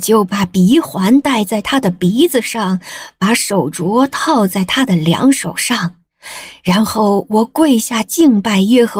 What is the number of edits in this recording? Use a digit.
0